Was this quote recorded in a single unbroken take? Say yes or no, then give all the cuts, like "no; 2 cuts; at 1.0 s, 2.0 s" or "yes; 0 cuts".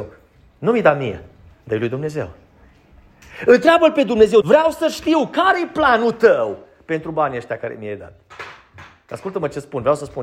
no; 1 cut; at 4.4 s